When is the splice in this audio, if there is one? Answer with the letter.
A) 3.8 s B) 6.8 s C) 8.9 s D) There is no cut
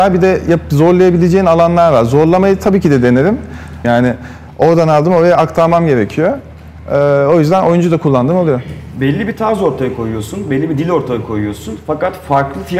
A